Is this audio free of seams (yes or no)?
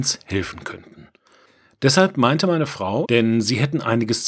no